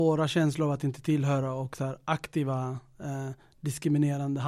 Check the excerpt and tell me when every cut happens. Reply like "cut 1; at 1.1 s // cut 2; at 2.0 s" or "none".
none